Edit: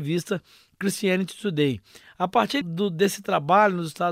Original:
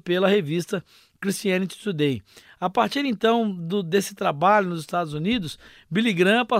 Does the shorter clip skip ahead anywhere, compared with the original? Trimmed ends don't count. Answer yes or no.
yes